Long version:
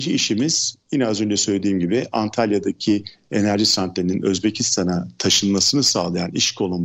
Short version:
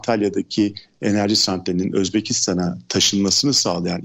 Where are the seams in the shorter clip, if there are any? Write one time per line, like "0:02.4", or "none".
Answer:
none